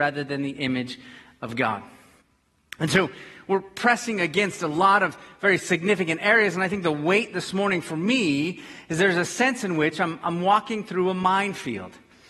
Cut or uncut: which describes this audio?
uncut